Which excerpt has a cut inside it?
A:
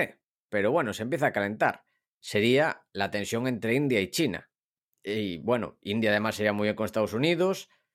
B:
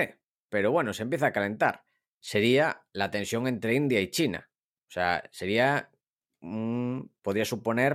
A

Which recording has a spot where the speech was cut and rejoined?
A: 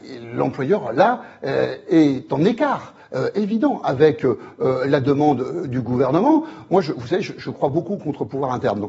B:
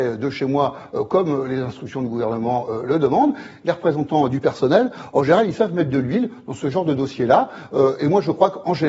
B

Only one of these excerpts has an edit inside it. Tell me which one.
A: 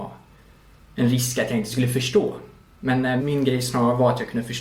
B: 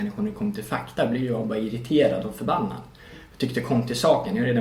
A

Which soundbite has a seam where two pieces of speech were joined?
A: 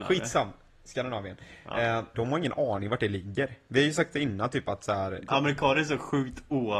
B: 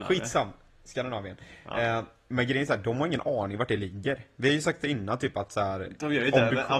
A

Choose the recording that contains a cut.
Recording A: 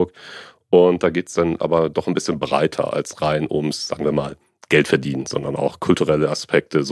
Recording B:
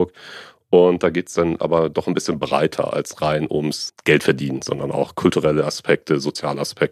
B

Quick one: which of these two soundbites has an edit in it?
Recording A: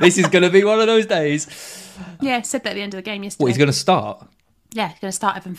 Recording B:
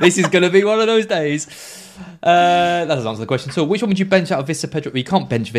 A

